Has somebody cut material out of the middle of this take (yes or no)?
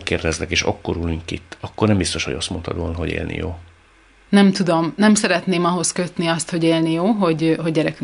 no